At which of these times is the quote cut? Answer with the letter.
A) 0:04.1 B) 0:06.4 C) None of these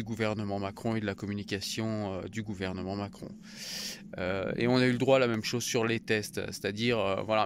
C